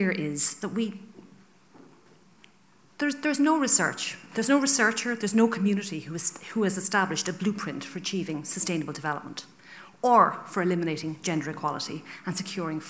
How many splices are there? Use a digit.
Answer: 0